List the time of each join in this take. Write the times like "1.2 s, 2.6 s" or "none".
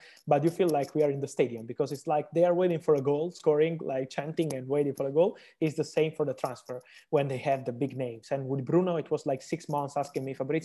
none